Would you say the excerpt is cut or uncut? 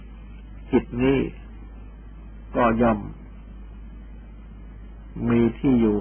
uncut